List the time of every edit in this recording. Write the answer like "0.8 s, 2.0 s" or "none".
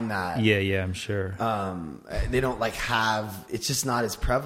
none